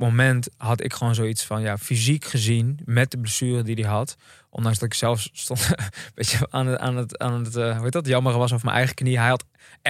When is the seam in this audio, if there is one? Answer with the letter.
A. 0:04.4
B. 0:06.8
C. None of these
C